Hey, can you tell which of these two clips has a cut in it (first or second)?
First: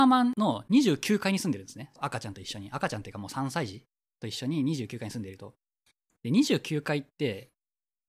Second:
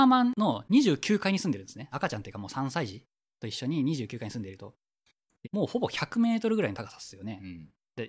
second